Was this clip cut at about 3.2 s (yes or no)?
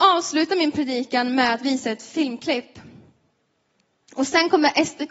no